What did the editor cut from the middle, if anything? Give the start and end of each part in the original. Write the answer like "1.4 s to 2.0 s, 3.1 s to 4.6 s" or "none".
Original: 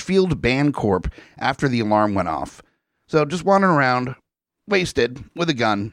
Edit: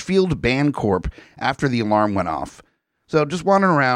none